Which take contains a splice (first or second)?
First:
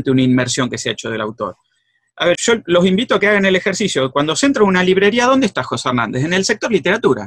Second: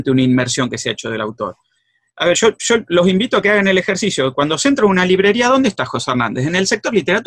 first